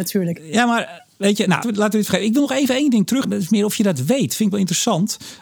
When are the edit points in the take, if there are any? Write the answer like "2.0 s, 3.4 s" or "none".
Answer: 1.6 s, 3.2 s